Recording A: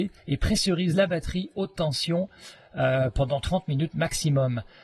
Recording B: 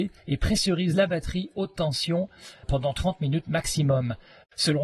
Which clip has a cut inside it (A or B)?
B